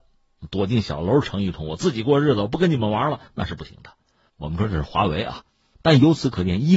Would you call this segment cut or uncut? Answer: cut